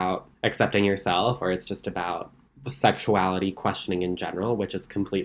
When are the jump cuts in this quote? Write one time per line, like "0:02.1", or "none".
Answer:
none